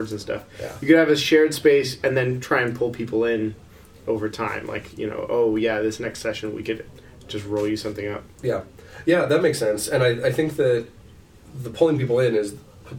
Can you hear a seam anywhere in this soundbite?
no; 0 cuts

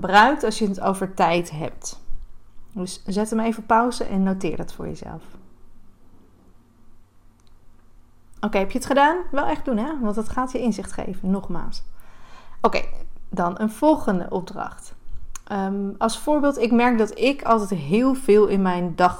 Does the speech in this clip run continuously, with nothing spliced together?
yes; 0 cuts

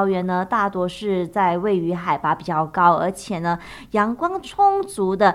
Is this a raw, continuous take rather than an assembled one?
yes; 0 cuts

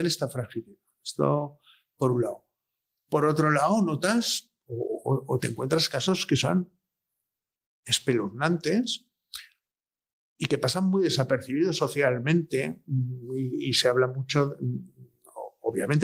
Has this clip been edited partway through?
no; 0 cuts

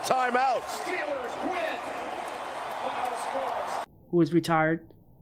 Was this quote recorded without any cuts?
no; 1 cut; at 4.0 s

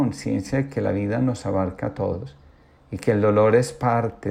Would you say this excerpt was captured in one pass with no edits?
yes; 0 cuts

